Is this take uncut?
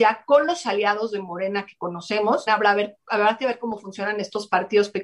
no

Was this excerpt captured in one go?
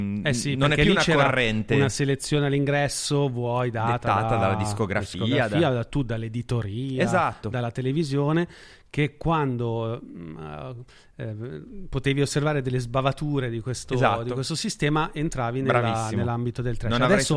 yes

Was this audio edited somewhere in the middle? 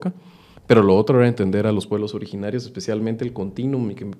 no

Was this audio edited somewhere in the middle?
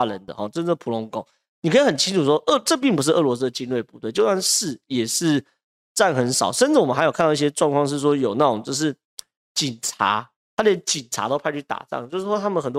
no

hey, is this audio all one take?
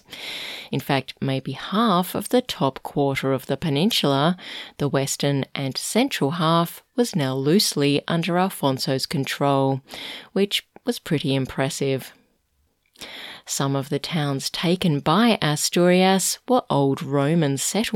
yes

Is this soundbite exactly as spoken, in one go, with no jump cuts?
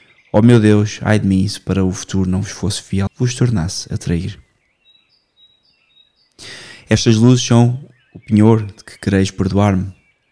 no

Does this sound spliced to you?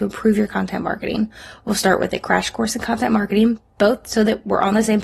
no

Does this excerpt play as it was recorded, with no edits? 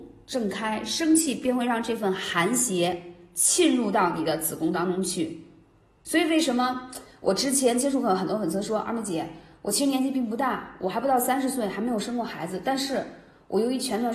yes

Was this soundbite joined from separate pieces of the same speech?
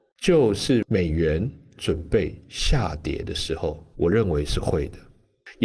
yes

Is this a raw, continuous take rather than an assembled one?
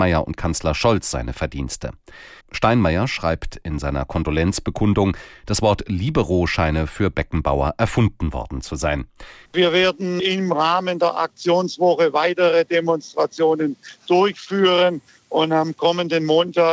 no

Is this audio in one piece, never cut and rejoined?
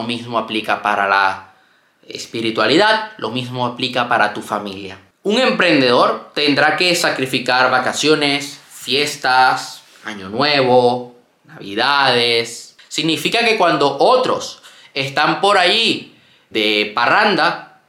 no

